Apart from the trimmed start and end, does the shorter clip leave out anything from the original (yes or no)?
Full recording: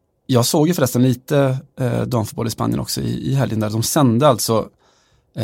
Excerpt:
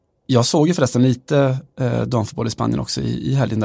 no